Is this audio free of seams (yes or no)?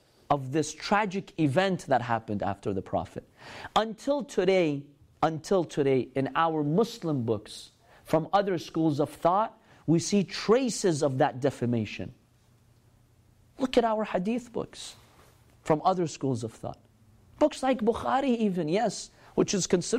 yes